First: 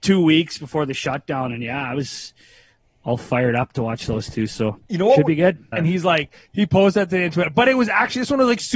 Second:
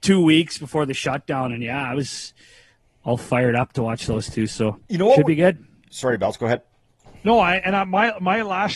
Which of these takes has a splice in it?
first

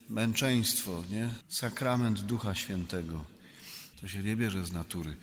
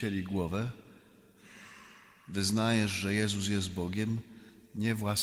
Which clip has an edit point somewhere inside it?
first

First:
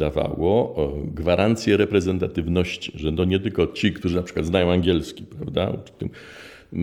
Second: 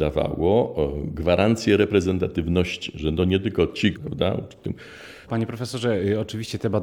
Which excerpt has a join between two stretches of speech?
second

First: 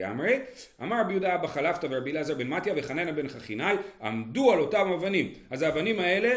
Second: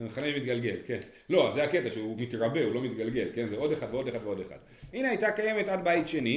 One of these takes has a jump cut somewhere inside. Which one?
second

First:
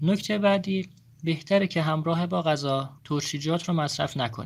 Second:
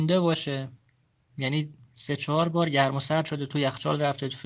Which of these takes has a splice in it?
first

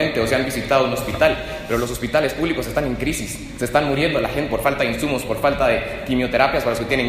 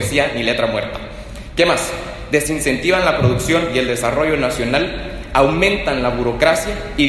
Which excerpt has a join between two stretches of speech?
first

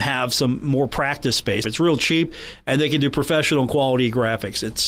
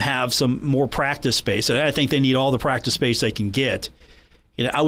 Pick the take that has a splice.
first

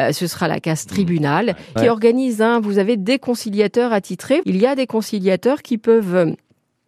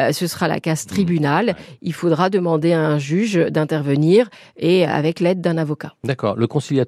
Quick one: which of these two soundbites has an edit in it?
first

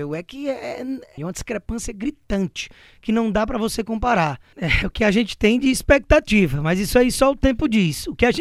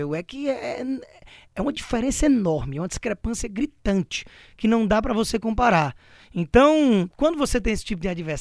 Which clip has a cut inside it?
first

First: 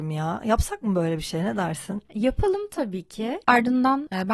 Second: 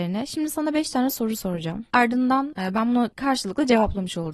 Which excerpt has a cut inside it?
first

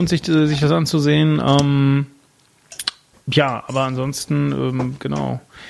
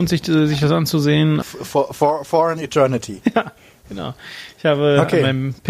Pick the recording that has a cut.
second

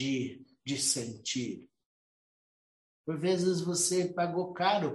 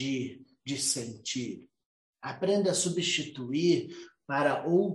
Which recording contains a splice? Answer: second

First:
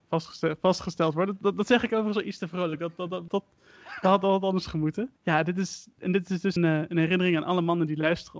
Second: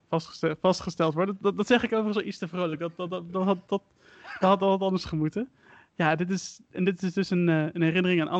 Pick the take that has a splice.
first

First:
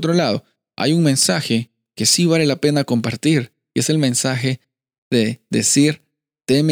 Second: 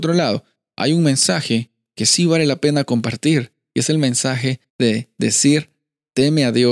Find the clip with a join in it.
second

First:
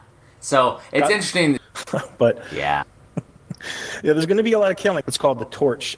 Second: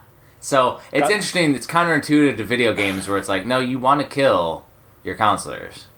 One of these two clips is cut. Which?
first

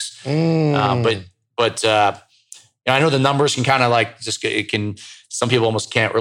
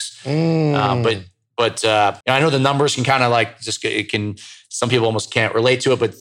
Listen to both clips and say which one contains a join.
second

